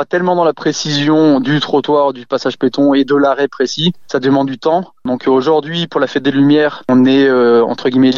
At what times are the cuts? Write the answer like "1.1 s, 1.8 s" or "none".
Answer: none